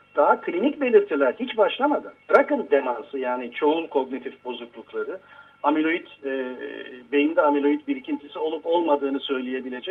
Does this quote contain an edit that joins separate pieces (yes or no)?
yes